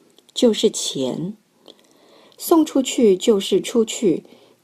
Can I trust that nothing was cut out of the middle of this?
no; 1 cut; at 2.2 s

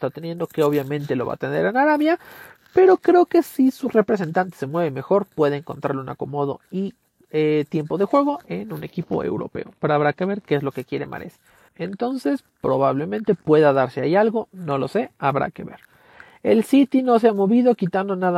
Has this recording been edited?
yes; 1 cut; at 11.7 s

